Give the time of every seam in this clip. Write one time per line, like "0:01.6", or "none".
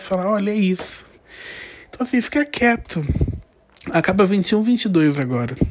none